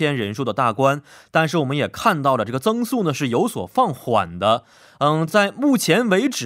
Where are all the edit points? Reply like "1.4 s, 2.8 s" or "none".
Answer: none